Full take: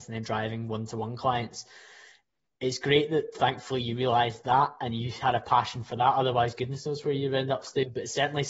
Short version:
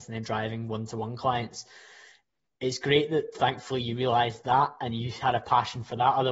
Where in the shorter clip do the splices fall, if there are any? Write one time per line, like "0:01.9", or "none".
none